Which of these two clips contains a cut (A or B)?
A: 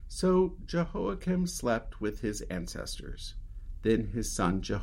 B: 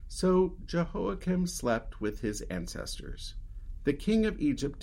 B